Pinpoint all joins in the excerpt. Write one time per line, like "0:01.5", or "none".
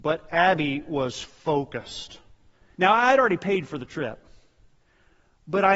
0:02.7